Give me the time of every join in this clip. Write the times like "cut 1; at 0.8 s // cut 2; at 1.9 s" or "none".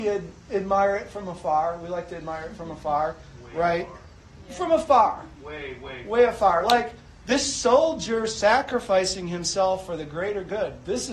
none

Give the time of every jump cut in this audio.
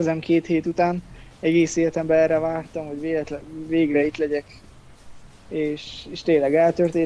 none

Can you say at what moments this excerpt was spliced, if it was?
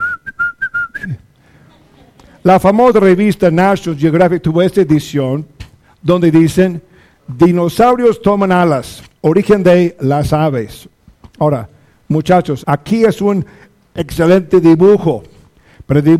cut 1; at 12.6 s

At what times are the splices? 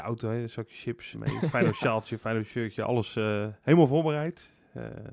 cut 1; at 1.1 s

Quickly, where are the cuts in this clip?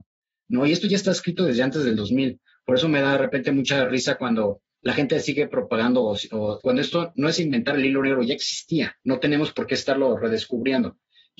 cut 1; at 6.6 s // cut 2; at 9.0 s

